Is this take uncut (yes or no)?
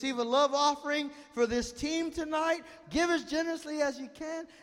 no